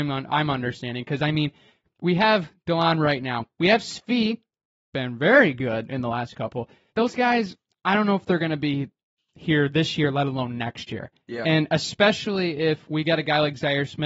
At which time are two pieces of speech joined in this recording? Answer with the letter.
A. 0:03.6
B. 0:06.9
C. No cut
B